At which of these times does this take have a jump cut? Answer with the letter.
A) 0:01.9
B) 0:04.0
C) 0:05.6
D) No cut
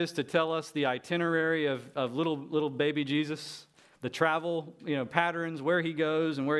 D